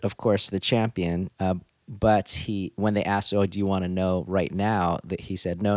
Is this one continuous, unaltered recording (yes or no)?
no